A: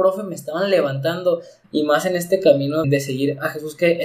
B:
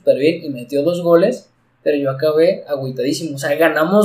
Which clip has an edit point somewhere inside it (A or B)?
A